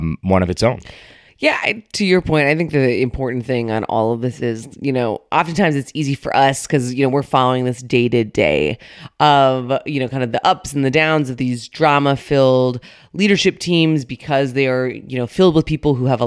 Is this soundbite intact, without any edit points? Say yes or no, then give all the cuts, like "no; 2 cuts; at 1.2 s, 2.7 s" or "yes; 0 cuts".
yes; 0 cuts